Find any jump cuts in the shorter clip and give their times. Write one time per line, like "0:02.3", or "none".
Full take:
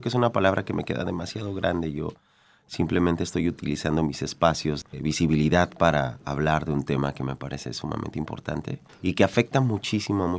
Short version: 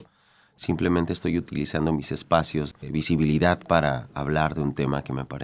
none